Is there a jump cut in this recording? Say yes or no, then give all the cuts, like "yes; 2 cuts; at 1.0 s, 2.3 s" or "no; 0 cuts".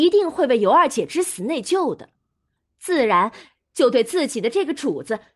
no; 0 cuts